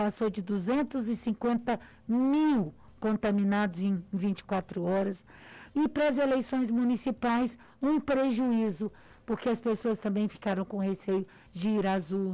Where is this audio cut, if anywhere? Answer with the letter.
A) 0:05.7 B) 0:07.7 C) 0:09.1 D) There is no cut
A